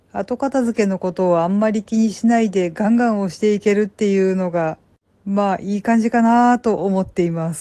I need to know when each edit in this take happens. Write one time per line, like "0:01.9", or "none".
none